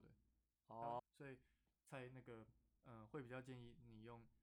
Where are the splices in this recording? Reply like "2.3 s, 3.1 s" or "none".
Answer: 1.0 s, 2.8 s